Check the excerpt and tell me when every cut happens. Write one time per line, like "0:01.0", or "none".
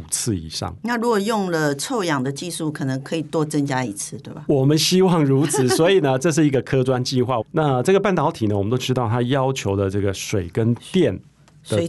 0:07.4

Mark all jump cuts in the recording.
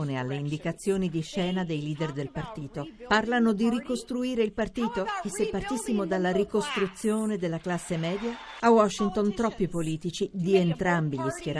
0:08.6

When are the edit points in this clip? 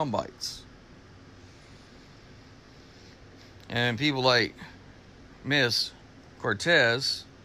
none

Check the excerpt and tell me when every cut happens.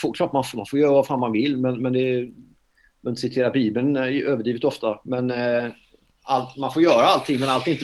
none

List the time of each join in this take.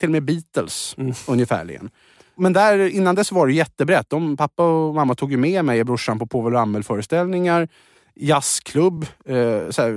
none

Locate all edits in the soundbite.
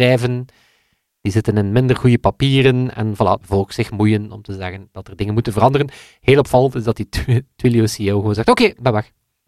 0:03.4

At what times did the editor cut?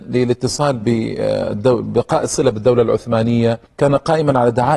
0:03.7

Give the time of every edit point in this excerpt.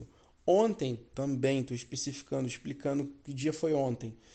0:01.1

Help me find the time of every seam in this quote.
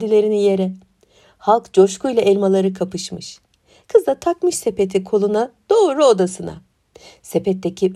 none

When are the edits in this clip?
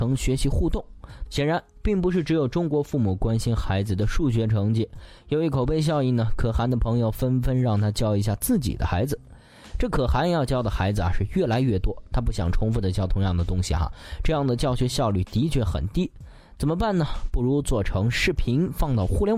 0:01.3

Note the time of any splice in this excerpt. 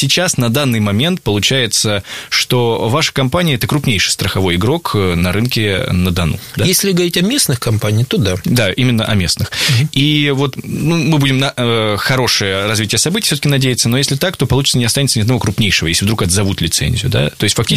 none

